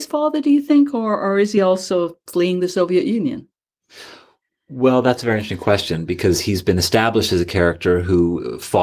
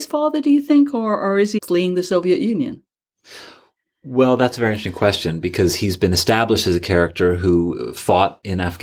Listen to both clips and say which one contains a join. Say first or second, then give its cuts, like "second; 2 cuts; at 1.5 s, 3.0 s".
second; 1 cut; at 1.6 s